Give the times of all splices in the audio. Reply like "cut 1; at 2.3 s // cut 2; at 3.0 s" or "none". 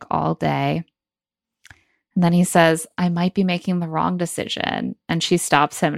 none